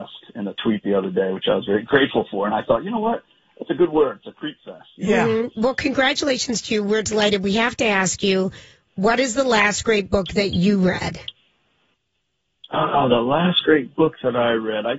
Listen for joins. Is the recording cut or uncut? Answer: uncut